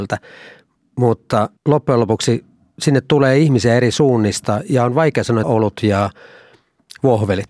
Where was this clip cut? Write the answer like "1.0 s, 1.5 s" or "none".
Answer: 1.6 s, 5.4 s